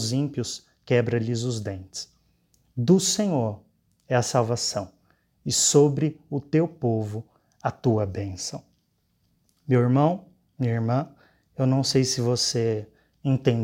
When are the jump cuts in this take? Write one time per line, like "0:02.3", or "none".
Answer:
none